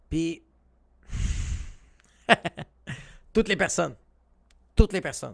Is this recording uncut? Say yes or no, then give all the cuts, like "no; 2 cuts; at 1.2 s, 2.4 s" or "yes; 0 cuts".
yes; 0 cuts